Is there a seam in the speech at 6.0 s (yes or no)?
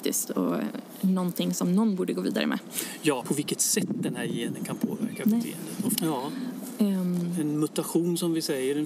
yes